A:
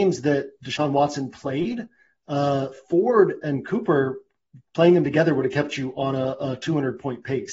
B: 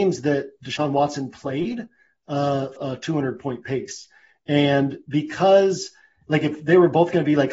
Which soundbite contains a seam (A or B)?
B